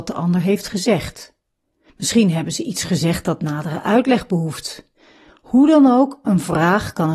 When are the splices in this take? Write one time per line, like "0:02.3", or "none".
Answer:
0:05.3